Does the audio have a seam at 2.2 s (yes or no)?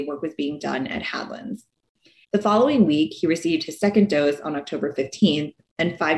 yes